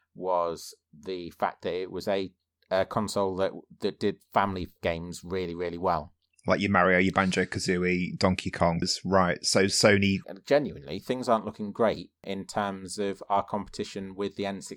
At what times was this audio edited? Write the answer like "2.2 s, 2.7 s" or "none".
8.8 s, 10.2 s